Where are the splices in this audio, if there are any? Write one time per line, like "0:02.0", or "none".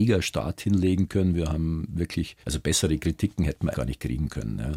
0:02.4
0:03.7